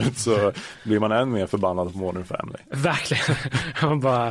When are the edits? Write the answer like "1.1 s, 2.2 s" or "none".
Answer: none